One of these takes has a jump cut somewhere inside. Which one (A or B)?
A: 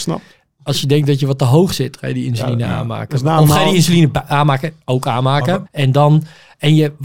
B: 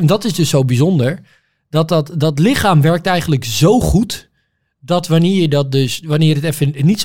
A